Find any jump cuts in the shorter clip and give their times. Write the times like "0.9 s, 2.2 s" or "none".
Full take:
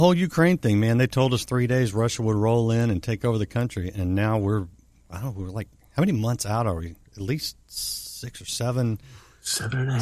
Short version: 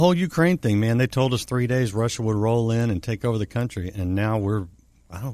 none